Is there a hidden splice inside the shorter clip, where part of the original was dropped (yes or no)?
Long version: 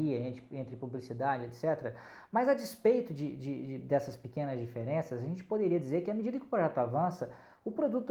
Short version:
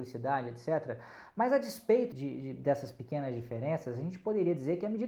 yes